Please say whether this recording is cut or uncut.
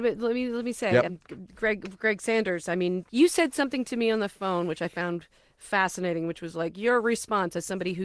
uncut